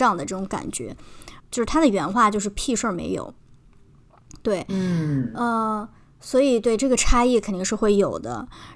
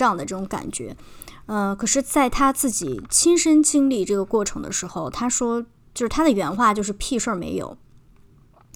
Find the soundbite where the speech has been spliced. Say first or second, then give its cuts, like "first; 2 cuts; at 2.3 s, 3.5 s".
first; 1 cut; at 1.4 s